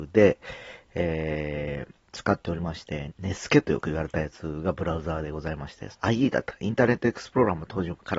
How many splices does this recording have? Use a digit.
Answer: 2